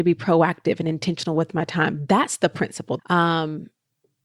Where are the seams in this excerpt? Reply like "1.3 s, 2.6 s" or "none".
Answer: 3.0 s